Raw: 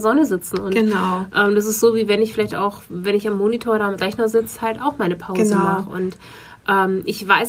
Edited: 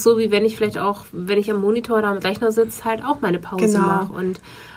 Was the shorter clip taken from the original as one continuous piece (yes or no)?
yes